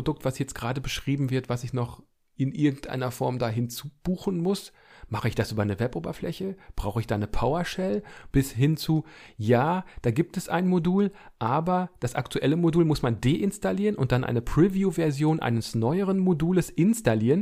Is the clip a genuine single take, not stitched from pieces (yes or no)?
no